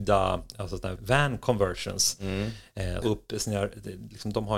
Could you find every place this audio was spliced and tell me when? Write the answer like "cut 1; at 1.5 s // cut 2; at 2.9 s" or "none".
cut 1; at 1.0 s // cut 2; at 3.0 s